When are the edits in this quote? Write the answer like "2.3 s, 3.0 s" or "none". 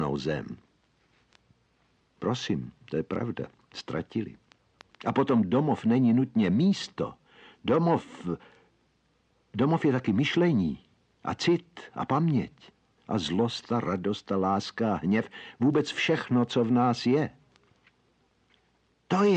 4.9 s

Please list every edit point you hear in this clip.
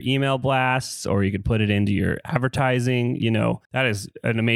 3.6 s

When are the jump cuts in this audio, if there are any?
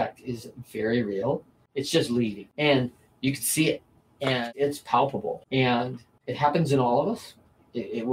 1.7 s

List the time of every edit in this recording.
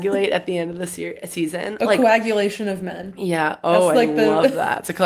none

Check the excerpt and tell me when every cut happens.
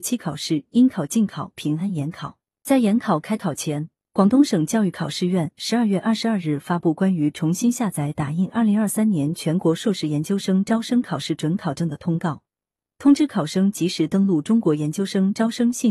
none

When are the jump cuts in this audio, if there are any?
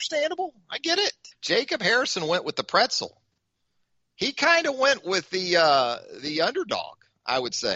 1.3 s

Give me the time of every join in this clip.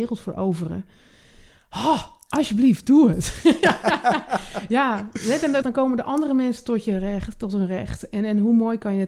5.6 s

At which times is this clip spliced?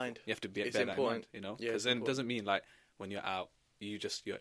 none

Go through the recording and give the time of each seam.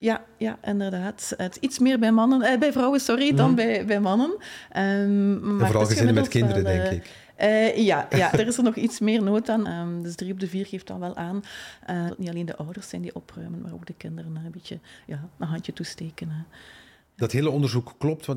8.3 s, 9.6 s, 12.1 s

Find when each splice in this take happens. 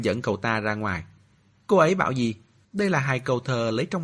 2.6 s

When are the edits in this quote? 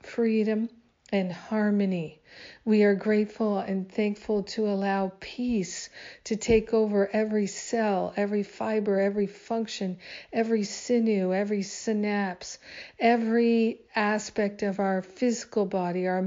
none

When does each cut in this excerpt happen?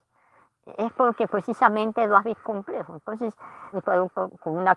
2.4 s, 3.7 s

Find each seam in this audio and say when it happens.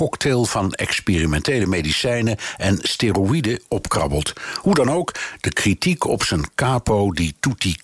none

